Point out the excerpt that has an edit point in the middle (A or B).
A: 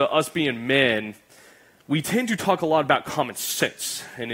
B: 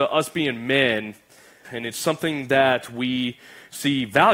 B